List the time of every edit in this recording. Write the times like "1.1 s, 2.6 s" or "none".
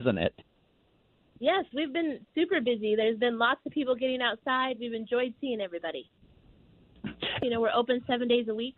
7.4 s